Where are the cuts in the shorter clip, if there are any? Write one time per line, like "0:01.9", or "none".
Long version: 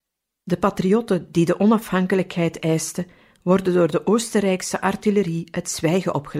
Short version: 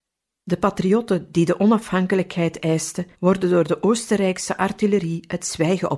0:03.1